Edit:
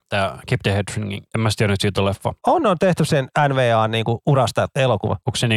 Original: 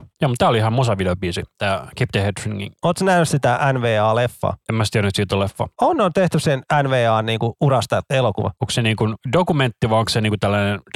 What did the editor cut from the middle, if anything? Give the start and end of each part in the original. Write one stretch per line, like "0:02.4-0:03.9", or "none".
0:02.8-0:04.6